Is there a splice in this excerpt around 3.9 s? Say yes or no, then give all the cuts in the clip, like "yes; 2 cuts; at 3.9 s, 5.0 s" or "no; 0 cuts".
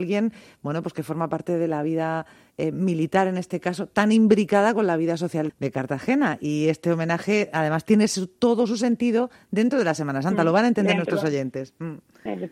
no; 1 cut; at 5.5 s